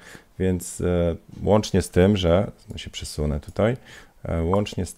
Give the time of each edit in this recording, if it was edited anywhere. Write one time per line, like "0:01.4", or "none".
none